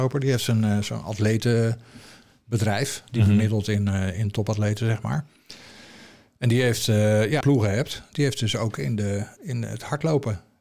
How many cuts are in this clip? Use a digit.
1